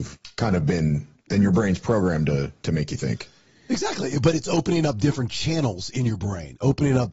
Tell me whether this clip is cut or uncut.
uncut